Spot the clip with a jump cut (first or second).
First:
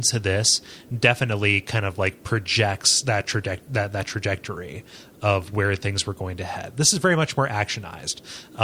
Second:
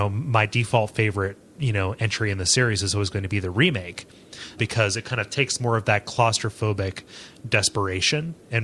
second